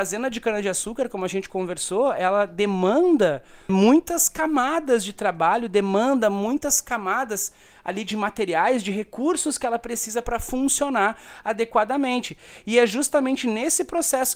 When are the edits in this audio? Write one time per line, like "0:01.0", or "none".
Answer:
0:03.7

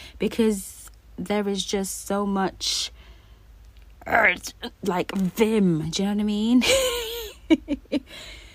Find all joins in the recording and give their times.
none

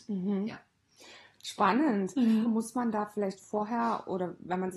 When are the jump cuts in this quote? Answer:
0:02.4

